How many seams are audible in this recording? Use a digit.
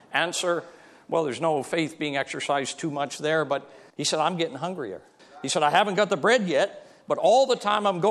2